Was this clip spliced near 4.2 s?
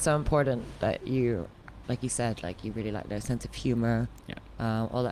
no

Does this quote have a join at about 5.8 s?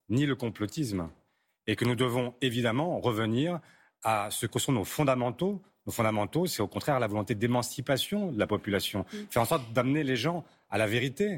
no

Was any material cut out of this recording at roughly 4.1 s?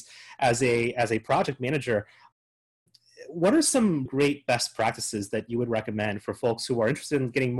yes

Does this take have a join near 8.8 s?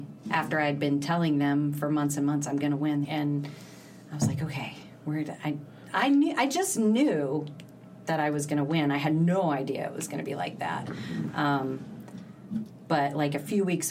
no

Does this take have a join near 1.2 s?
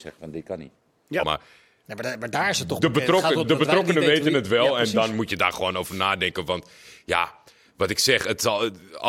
yes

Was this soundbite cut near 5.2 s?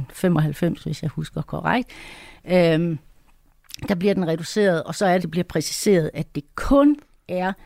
yes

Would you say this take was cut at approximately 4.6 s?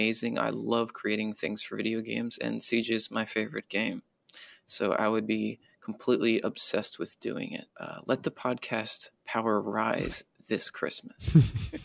no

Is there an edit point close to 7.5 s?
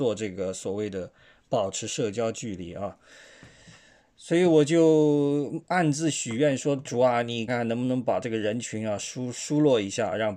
yes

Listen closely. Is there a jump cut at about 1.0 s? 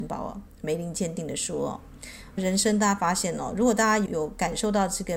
no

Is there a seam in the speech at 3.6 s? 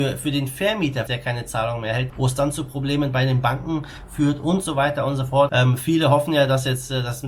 no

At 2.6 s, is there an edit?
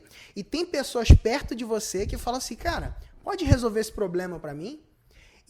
no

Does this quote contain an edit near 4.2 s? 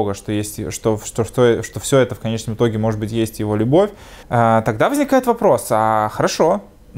yes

